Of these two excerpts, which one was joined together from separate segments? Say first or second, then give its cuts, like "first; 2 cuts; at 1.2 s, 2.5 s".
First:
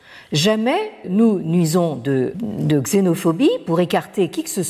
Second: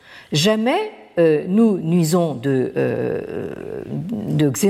first; 2 cuts; at 1.0 s, 2.3 s